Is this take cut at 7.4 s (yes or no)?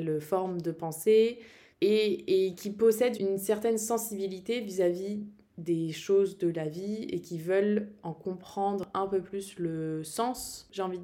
no